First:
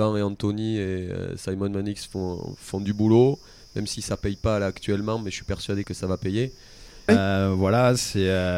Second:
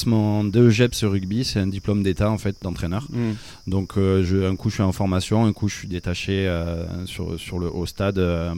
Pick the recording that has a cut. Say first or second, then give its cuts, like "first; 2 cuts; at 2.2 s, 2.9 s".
first; 1 cut; at 7.1 s